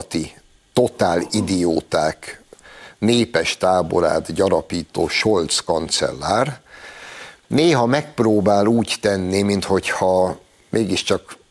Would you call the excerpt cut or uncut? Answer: uncut